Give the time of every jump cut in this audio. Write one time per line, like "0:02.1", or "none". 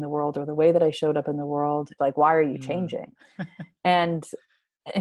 0:02.0